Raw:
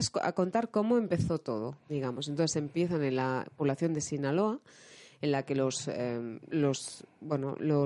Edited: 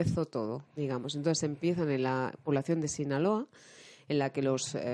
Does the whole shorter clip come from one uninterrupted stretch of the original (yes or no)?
yes